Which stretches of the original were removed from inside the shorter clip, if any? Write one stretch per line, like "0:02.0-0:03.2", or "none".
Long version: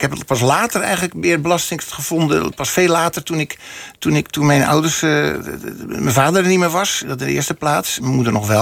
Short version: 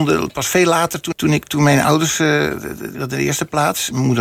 0:03.3-0:03.9
0:05.8-0:07.0